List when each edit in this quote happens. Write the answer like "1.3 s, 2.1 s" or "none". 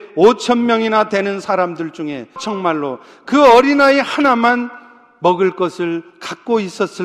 2.4 s